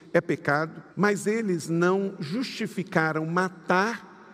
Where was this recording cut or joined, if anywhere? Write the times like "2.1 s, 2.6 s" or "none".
0.9 s